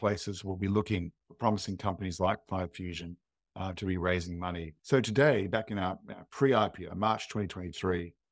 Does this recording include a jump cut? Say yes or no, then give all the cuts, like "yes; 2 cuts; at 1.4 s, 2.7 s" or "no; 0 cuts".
yes; 3 cuts; at 1.2 s, 4.8 s, 6.9 s